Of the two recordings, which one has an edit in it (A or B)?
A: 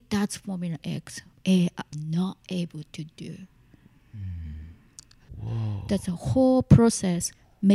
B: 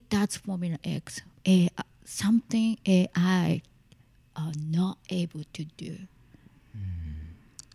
A